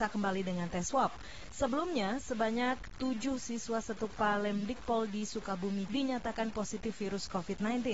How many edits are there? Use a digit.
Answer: 1